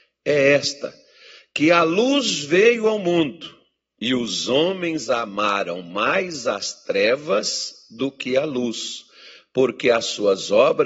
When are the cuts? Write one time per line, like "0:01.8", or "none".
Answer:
none